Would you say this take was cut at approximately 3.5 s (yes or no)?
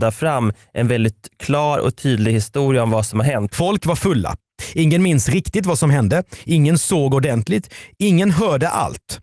yes